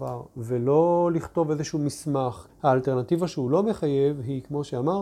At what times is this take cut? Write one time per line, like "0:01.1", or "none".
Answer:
0:02.5